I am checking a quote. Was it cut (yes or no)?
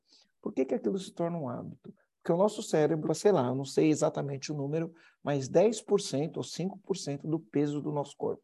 yes